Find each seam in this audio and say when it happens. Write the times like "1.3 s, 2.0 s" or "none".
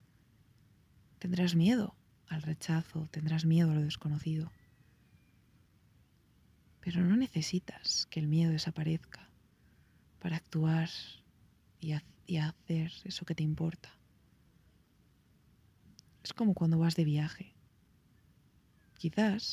none